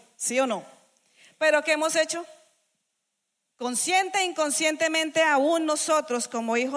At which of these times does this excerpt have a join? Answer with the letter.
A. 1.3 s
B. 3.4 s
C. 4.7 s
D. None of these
B